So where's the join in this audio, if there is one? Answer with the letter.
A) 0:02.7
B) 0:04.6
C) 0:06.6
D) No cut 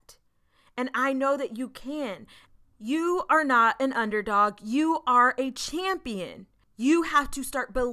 D